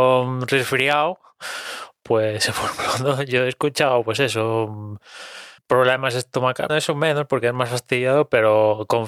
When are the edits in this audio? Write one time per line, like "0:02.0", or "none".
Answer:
0:05.6
0:06.7